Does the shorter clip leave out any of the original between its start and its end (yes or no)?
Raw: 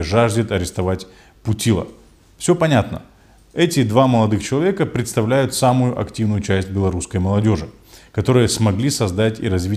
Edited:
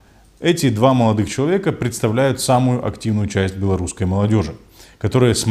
no